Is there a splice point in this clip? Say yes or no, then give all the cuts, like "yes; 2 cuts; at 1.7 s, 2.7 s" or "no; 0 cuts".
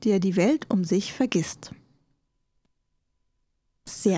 no; 0 cuts